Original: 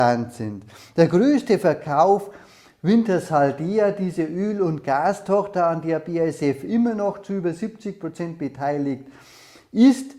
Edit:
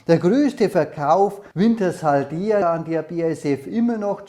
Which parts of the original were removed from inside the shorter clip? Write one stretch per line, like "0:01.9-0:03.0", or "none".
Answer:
0:02.4-0:02.8
0:03.9-0:05.6

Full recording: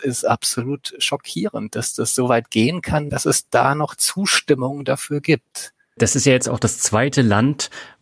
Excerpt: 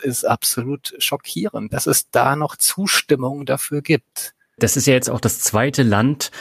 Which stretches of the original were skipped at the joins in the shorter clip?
0:01.7-0:03.1

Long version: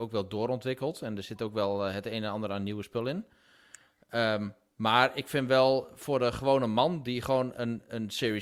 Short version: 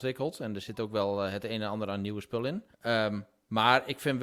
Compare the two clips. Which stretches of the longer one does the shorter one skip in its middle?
0:03.3-0:04.0

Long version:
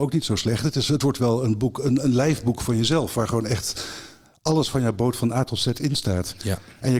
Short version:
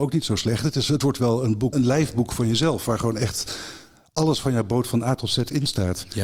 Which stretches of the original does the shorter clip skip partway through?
0:01.7-0:02.0

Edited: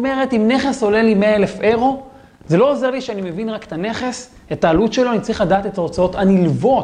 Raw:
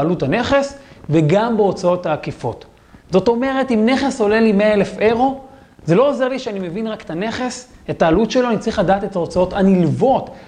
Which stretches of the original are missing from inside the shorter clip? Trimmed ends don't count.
none

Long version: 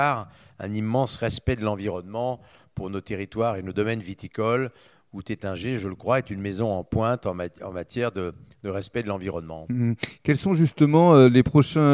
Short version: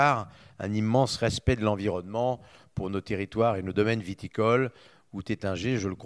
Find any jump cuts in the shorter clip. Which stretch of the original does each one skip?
none

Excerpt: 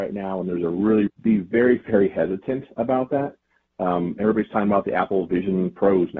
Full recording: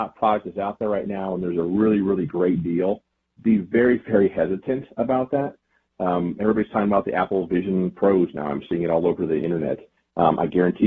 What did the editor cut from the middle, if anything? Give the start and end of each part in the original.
0:02.0-0:03.3

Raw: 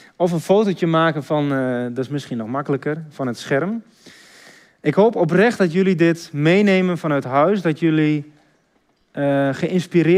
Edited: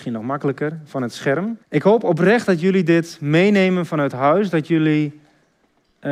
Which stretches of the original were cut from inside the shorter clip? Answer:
0:03.9-0:04.7

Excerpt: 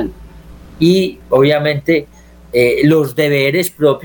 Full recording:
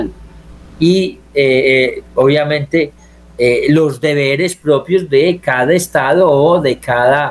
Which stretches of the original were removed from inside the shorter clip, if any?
0:01.2-0:02.1

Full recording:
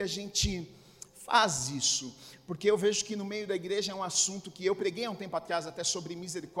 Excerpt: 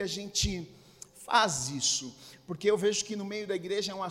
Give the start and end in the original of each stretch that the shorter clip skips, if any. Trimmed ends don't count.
none

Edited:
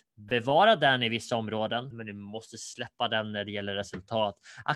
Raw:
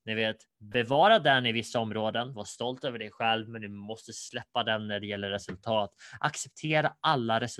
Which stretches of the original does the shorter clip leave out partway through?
0:02.3-0:03.5

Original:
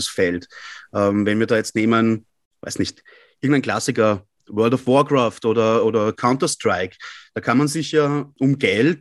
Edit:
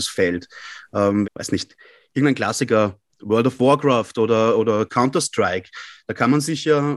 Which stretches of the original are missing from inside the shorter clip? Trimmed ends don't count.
0:01.2-0:02.5

